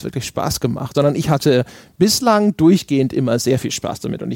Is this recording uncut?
yes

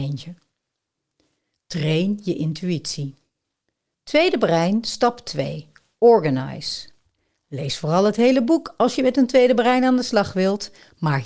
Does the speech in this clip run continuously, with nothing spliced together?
yes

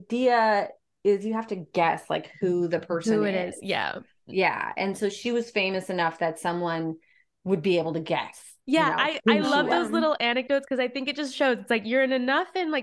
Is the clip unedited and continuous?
yes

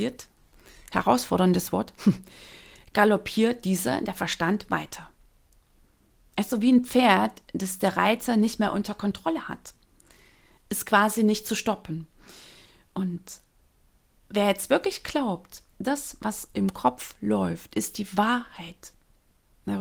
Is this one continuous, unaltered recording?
yes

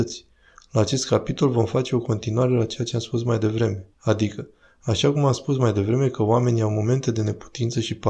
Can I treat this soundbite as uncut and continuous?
no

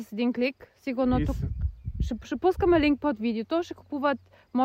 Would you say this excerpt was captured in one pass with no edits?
yes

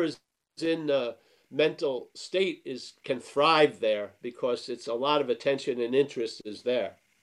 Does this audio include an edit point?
no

